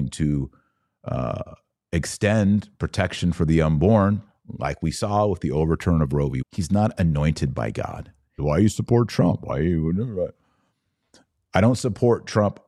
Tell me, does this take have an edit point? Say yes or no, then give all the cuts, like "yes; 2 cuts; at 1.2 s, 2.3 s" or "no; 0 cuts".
yes; 2 cuts; at 6.4 s, 8.4 s